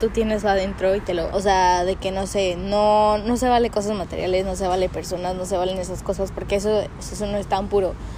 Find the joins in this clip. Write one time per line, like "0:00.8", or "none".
0:01.3
0:07.0